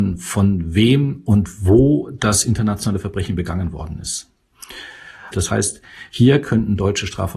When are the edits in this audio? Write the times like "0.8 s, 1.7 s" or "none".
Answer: 5.3 s

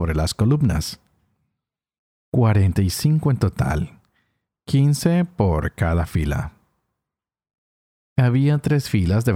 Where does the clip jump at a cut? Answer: none

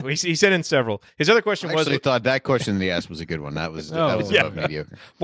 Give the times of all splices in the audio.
none

